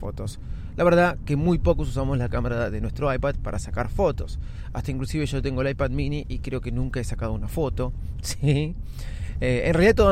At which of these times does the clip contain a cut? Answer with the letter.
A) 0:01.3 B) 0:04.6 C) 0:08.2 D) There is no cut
C